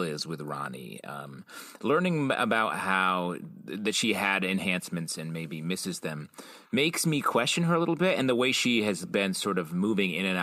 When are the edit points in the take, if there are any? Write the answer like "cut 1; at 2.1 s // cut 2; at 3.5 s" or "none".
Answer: none